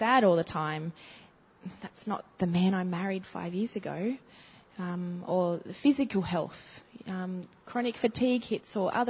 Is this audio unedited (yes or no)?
yes